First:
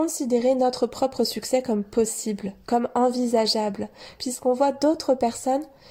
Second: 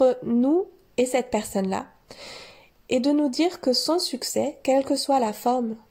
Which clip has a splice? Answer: first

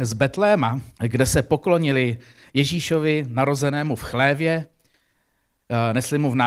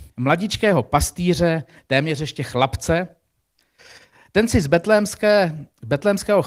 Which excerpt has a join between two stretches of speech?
first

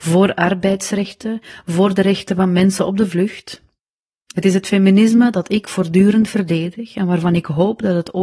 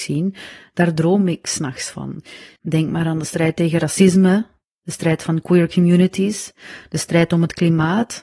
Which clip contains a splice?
second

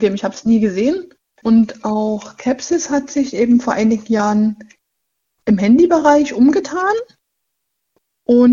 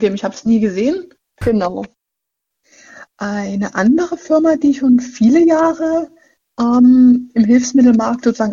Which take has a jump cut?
second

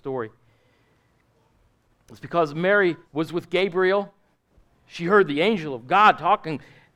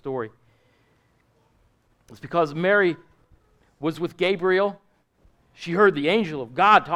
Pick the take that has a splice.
first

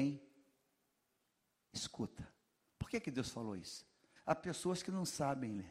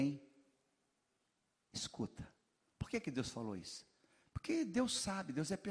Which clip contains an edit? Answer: first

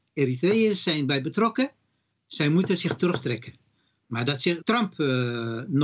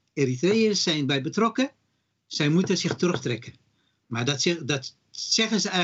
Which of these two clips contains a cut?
first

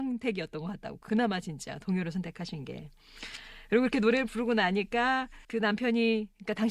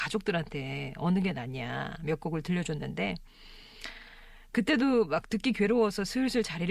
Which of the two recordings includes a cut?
first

